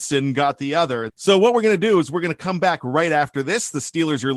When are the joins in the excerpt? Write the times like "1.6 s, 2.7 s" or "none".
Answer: 1.1 s